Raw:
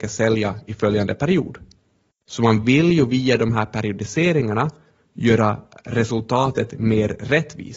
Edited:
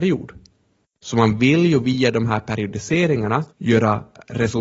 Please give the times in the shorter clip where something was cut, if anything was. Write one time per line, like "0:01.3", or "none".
0:03.5

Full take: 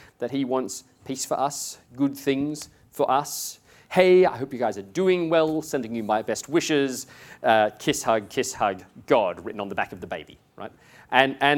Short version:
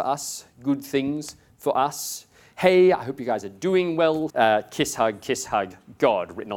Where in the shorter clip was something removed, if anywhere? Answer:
0:04.3

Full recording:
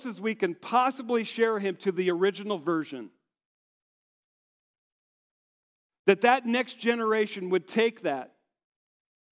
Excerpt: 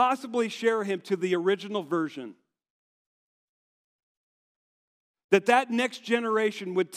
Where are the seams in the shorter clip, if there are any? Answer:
none

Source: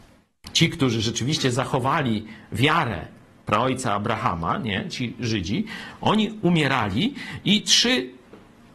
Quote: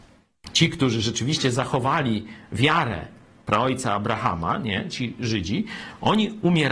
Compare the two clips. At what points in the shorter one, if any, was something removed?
none

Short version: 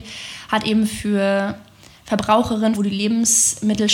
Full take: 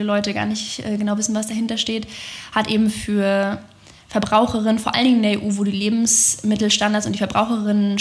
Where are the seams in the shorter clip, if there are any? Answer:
0:02.8

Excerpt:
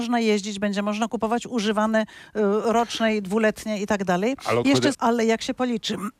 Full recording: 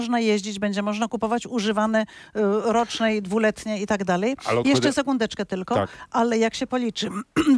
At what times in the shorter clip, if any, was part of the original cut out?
0:04.9

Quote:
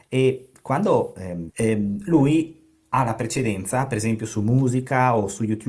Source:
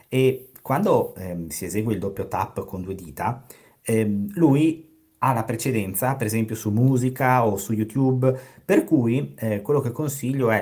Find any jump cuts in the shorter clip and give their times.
0:01.5

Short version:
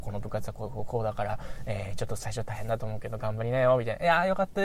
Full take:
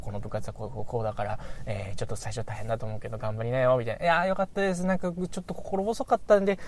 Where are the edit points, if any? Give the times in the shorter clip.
none

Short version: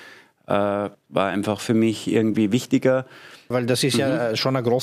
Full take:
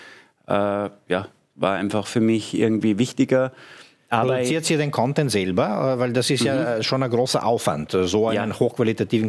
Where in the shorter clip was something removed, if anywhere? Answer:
0:00.9
0:03.5

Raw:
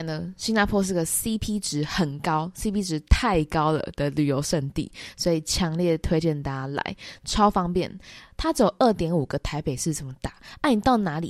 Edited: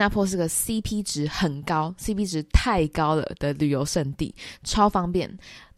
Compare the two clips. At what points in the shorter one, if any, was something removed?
0:04.6

